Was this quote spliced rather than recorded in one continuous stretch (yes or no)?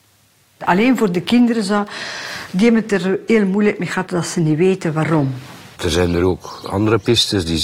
yes